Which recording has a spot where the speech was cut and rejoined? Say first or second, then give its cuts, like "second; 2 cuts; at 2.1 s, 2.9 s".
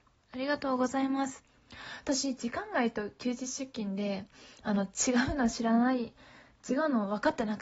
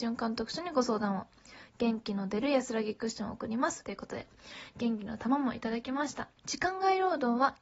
second; 2 cuts; at 3.8 s, 6.4 s